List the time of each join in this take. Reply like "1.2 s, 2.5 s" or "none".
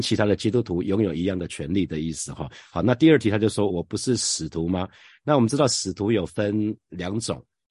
none

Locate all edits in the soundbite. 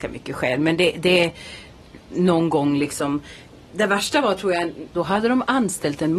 2.1 s, 4.9 s

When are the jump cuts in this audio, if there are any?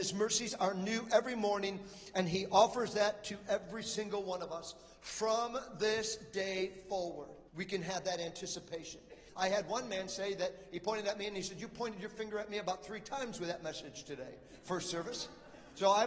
7.5 s, 9.3 s

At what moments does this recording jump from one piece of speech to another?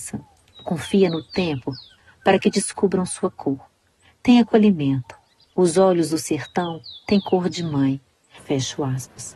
8.4 s

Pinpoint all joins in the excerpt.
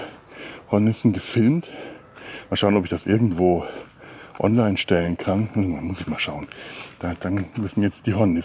none

